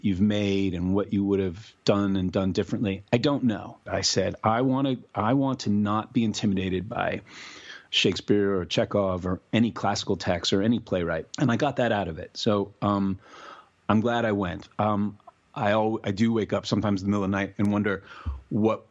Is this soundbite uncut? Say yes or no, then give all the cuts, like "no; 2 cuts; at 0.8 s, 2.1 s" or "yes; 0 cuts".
no; 2 cuts; at 3.9 s, 11.3 s